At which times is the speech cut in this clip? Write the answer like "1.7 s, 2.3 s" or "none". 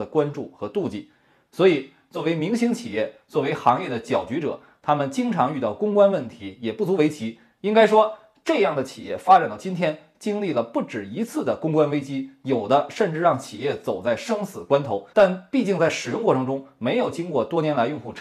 15.1 s